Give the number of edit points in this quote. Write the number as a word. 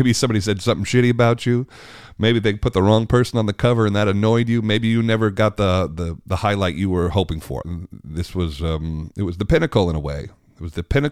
one